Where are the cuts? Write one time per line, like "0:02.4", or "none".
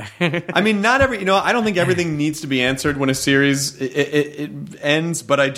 none